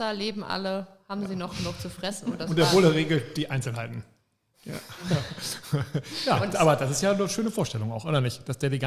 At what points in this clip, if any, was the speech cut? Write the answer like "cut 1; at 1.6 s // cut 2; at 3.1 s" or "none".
cut 1; at 4.5 s